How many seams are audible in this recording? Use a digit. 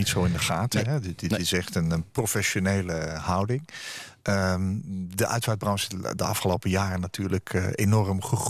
0